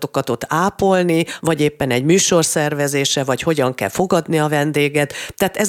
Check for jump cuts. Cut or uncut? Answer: cut